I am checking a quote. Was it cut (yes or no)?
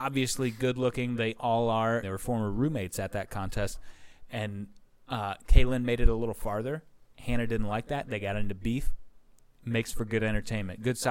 yes